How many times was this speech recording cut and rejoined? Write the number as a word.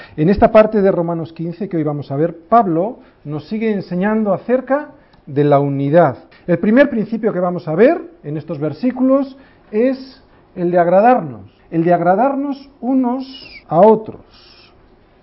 three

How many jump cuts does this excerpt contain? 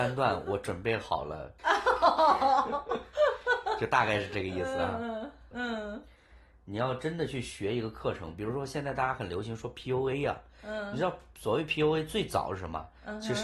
two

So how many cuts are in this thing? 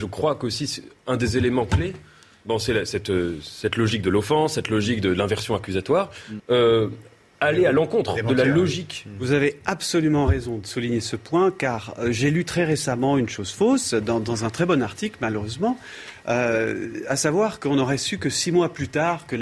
one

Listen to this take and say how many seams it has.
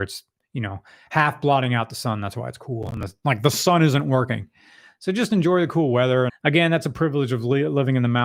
one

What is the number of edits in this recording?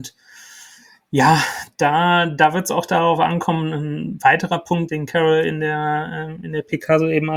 one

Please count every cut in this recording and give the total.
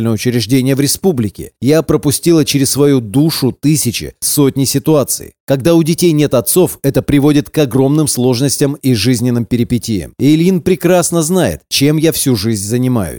zero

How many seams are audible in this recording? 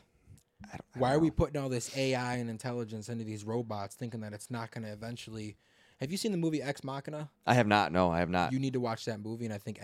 one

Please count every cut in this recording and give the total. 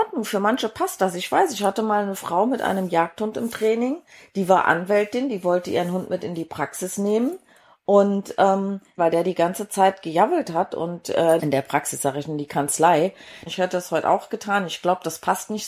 three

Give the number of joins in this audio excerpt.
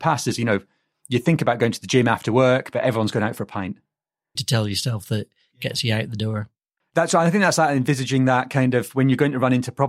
one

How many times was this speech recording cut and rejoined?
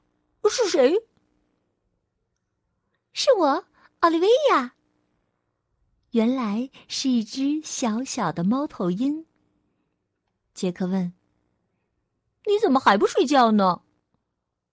zero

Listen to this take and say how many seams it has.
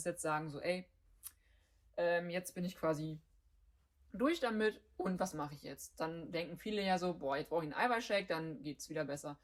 zero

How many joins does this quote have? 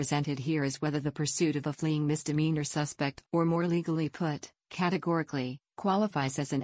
one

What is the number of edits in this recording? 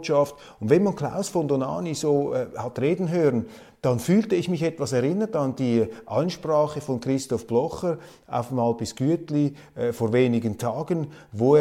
zero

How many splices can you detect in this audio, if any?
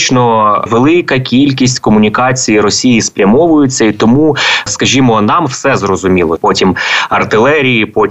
one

